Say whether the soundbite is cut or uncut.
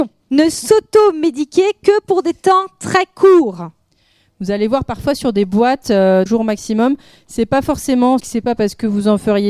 cut